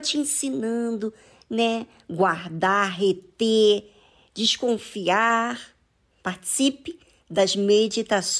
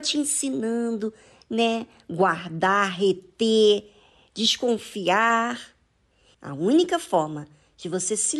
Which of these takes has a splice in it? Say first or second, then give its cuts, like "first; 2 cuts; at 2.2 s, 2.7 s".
first; 1 cut; at 6.2 s